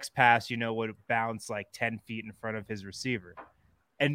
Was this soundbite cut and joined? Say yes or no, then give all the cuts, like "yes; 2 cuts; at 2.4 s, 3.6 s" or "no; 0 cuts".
no; 0 cuts